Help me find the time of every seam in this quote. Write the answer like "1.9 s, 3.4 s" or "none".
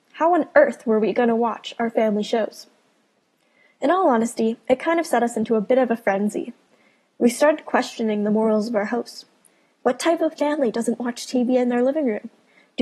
none

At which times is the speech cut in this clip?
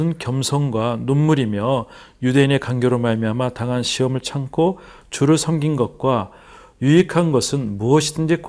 none

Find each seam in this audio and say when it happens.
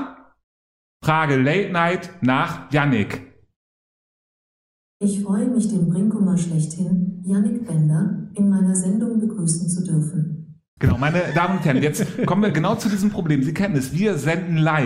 10.8 s

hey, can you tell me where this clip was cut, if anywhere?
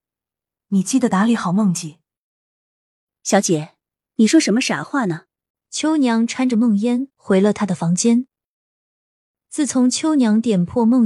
5.5 s

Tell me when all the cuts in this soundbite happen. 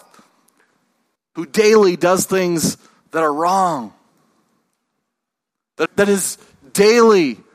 1.2 s, 5.9 s

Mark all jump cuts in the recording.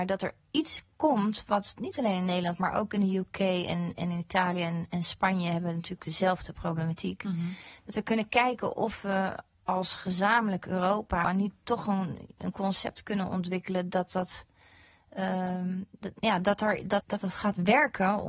11.2 s, 17.0 s

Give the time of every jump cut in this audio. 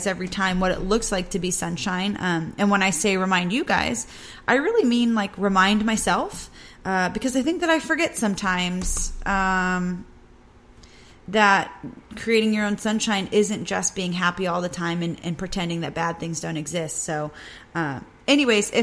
none

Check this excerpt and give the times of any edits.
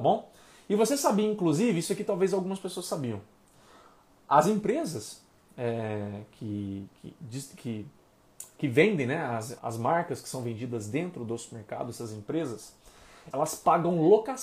9.6 s, 13.3 s

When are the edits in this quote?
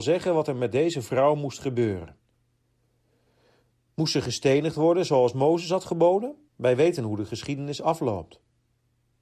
6.5 s

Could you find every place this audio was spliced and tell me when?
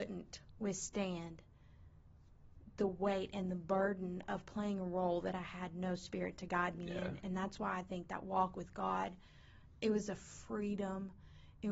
none

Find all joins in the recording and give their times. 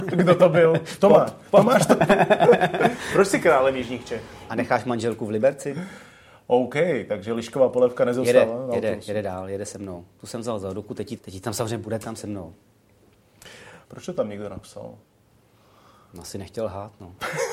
4.5 s, 11.2 s, 13.8 s

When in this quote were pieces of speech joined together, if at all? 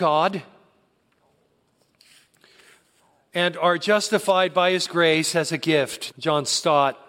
6.1 s

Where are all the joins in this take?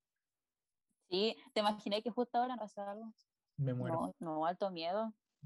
2.6 s, 4.1 s

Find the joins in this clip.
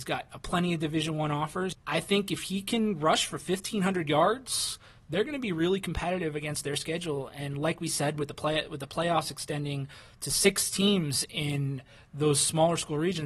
1.7 s

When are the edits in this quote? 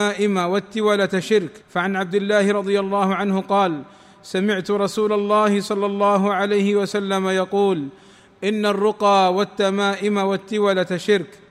1.6 s

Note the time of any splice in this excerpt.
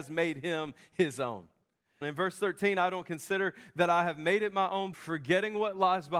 2.0 s, 4.9 s

